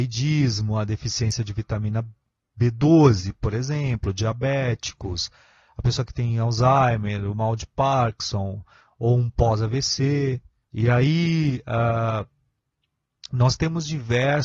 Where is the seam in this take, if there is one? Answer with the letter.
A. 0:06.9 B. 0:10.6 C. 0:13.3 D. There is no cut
B